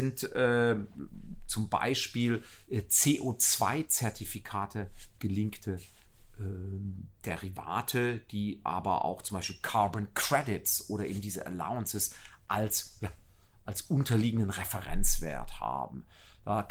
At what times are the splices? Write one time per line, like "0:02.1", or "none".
none